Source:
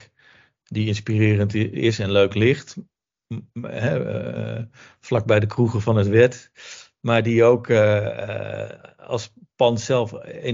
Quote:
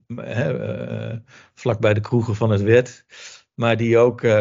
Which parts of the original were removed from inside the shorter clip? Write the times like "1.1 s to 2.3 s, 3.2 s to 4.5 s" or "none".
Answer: none